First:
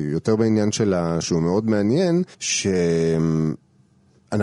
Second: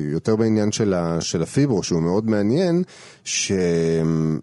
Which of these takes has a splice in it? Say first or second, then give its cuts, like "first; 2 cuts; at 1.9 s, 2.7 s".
first; 2 cuts; at 1.2 s, 2.3 s